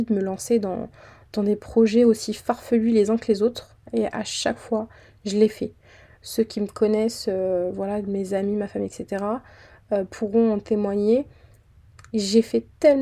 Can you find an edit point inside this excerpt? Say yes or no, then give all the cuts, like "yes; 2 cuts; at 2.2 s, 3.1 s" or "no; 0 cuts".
no; 0 cuts